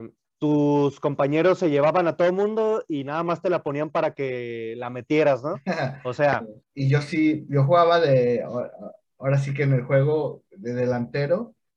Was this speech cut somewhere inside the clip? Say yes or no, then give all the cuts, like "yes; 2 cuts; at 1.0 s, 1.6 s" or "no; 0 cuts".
yes; 1 cut; at 6.6 s